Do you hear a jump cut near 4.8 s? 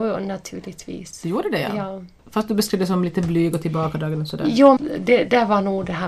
yes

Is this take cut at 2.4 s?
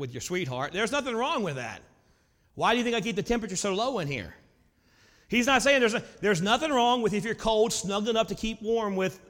no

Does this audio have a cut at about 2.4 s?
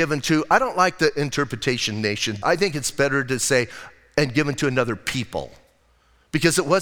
yes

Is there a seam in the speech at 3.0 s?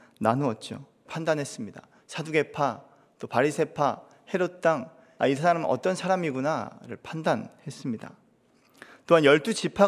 no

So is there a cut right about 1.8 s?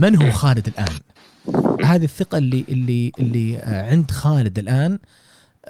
yes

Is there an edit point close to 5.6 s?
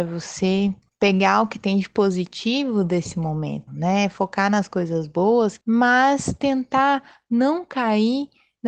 yes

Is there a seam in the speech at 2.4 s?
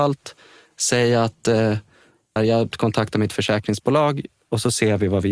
yes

